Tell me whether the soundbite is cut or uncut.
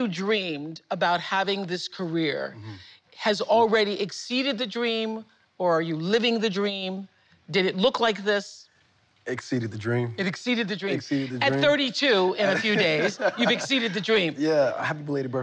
uncut